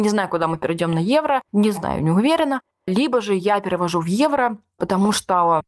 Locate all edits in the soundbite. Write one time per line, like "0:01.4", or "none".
0:01.5
0:02.7